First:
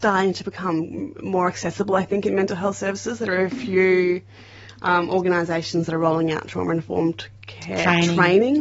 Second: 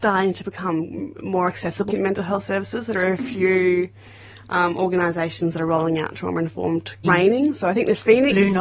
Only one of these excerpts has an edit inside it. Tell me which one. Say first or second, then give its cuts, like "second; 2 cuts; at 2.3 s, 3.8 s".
second; 2 cuts; at 1.9 s, 7.0 s